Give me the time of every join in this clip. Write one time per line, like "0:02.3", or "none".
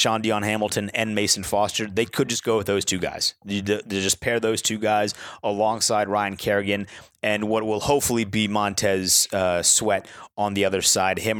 none